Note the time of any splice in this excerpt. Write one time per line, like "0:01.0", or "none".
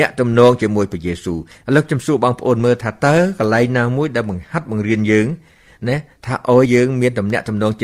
0:06.7